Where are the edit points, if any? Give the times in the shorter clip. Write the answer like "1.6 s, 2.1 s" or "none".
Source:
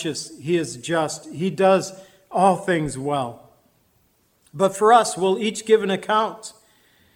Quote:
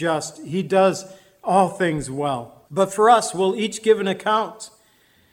2.7 s